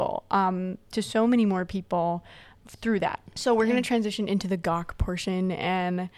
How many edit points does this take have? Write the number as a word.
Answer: one